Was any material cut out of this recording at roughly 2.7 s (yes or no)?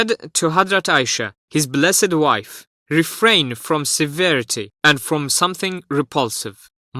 yes